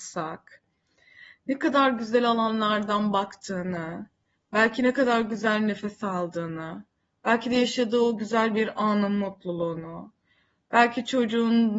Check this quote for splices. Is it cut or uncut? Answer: uncut